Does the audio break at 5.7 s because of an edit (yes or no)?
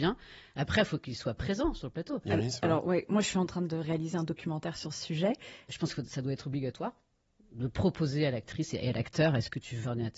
yes